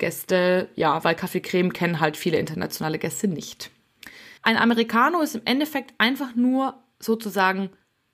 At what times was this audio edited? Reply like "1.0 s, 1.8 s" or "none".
1.0 s, 4.4 s